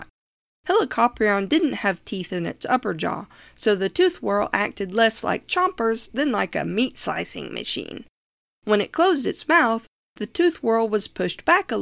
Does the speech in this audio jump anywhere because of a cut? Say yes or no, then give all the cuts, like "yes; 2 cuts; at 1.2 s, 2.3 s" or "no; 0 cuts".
no; 0 cuts